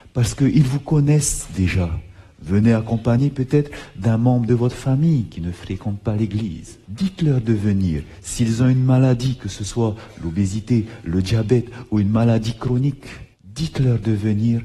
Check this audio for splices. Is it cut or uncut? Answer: cut